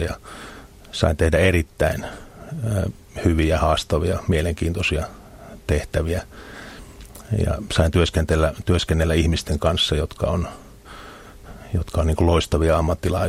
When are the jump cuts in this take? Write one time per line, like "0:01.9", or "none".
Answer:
none